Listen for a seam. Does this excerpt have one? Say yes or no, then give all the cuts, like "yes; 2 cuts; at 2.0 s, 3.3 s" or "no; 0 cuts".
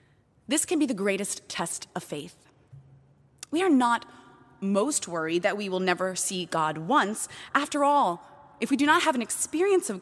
no; 0 cuts